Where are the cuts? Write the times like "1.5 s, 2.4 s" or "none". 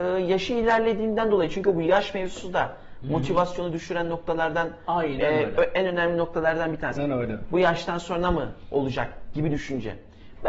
7.0 s